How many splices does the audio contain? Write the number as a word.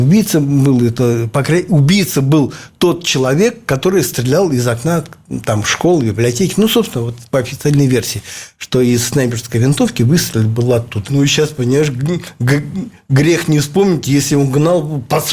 one